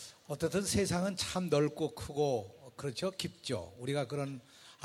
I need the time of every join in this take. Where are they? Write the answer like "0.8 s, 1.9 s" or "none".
none